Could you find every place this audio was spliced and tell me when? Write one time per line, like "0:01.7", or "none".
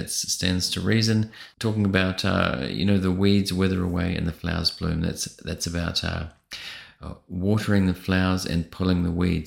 0:01.5